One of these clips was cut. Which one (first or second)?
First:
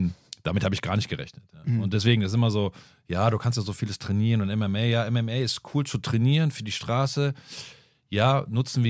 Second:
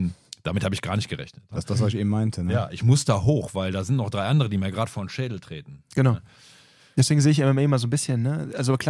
second